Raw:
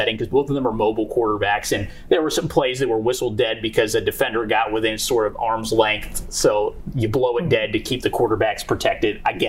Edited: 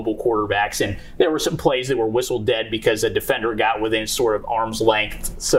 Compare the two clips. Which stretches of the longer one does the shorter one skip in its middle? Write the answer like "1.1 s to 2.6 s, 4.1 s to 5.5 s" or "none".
none